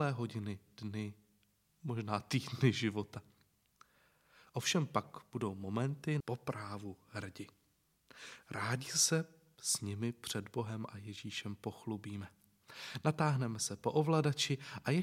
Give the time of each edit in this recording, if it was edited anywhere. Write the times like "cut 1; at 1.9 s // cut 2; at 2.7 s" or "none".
cut 1; at 6.2 s